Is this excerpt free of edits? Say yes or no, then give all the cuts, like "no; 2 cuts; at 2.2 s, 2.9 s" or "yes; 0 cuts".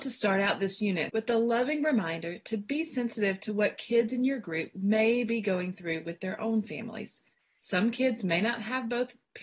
no; 1 cut; at 1.1 s